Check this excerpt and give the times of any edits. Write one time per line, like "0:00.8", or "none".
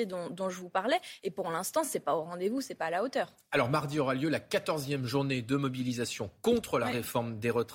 none